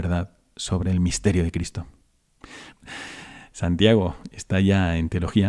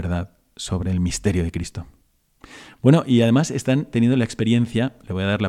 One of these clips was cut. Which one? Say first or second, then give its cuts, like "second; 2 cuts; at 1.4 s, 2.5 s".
first; 1 cut; at 2.7 s